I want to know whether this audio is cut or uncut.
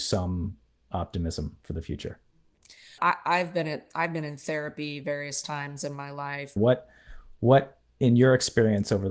cut